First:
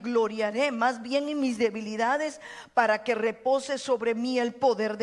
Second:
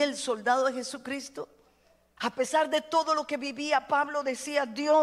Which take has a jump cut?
second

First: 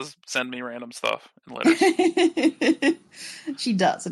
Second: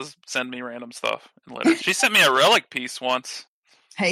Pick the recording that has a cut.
second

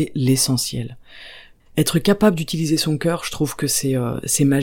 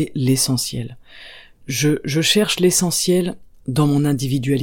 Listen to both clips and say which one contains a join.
first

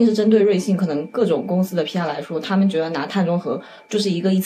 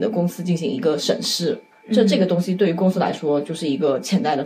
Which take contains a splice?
second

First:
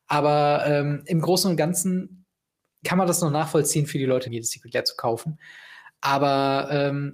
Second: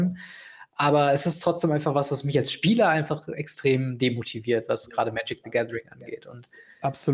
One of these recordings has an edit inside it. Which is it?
first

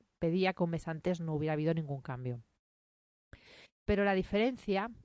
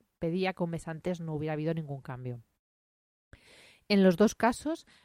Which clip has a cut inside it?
first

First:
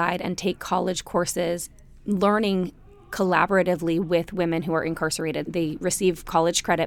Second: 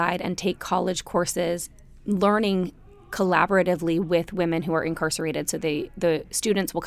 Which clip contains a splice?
first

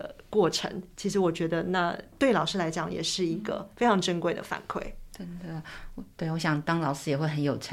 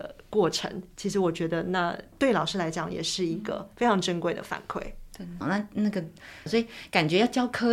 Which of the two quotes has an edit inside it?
second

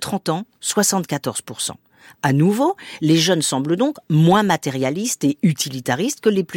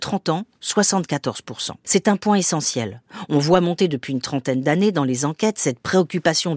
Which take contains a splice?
second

